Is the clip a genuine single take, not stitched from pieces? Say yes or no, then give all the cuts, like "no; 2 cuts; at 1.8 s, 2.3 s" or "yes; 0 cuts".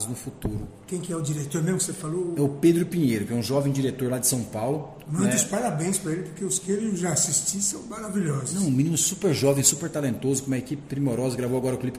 yes; 0 cuts